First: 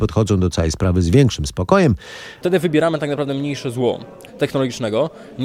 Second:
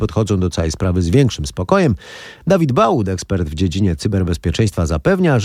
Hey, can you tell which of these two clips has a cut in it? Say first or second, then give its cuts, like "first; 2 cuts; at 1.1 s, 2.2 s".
first; 2 cuts; at 2.4 s, 4.3 s